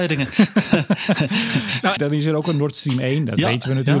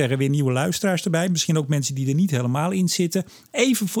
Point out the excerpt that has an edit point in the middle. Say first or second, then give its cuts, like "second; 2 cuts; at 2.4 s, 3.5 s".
first; 1 cut; at 2.0 s